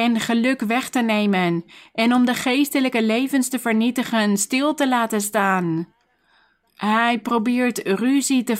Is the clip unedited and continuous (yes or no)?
no